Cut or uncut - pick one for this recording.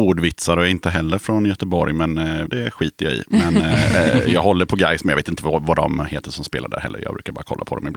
cut